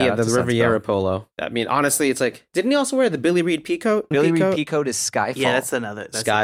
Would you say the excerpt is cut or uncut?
cut